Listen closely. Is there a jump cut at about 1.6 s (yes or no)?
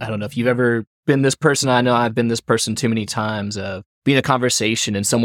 no